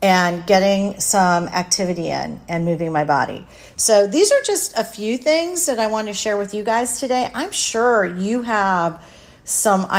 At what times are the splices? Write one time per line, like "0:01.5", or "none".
none